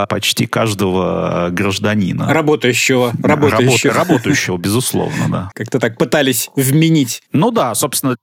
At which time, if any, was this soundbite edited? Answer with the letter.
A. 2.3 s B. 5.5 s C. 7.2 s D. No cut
B